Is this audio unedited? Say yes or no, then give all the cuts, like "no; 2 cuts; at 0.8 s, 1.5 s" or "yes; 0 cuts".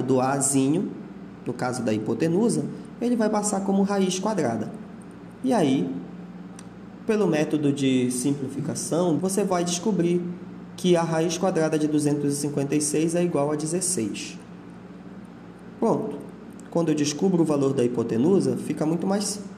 no; 1 cut; at 9.2 s